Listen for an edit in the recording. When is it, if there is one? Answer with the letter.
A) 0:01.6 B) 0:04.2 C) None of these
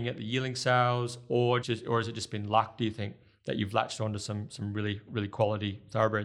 A